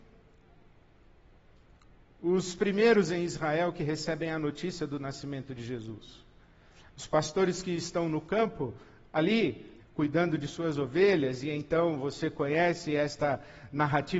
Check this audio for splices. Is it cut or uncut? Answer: cut